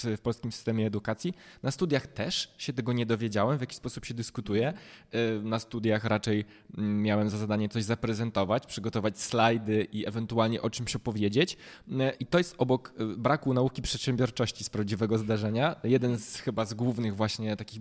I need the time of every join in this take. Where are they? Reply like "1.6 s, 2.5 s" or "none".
12.2 s